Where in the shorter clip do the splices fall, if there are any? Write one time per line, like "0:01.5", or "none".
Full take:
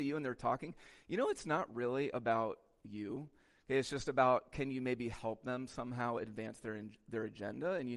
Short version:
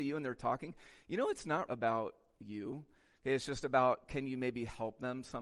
0:01.7